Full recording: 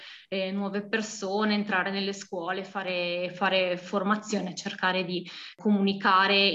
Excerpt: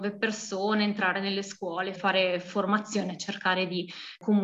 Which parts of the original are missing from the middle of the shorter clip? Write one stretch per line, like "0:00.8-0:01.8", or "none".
0:02.7-0:03.3